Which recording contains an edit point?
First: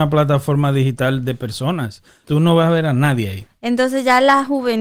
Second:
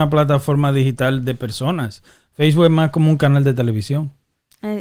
first; 1 cut; at 2.2 s

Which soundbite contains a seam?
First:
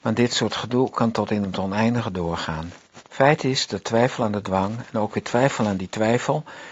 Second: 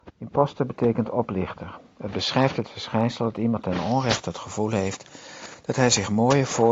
first; 1 cut; at 3.1 s

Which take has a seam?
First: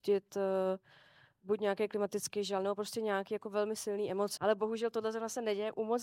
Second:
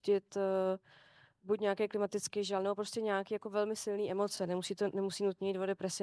first; 1 cut; at 4.4 s

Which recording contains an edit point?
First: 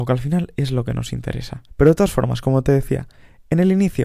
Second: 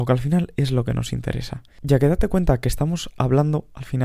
first; 1 cut; at 1.7 s

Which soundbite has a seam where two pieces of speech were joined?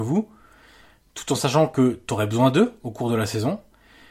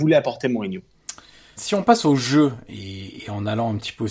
second; 1 cut; at 1.6 s

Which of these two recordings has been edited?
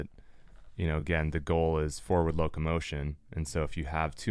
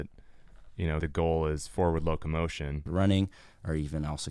second; 2 cuts; at 1.0 s, 2.9 s

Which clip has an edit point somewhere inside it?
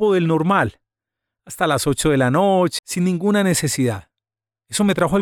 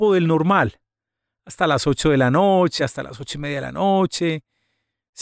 first; 1 cut; at 2.8 s

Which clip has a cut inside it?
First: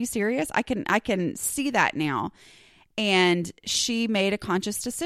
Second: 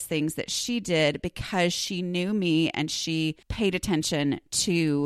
second; 1 cut; at 3.4 s

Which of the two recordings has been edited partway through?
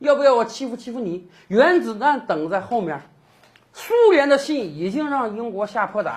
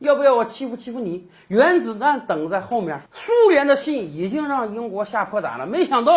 second; 1 cut; at 3.1 s

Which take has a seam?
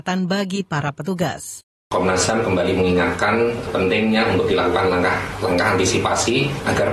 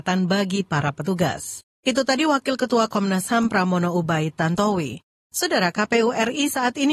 second; 1 cut; at 1.7 s

